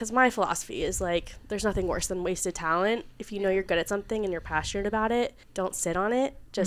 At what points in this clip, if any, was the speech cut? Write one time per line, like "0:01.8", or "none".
0:05.4